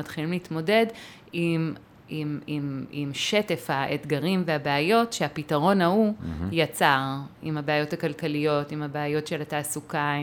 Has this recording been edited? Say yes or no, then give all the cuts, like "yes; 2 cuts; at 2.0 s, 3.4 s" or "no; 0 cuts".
no; 0 cuts